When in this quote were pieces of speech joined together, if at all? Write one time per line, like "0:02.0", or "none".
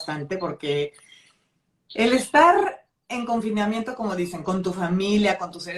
none

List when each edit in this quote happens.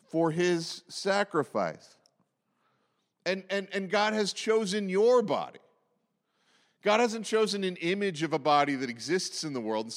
none

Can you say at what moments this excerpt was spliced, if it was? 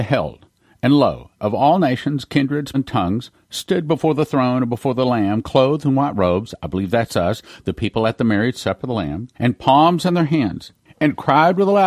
0:01.4
0:02.7
0:09.3

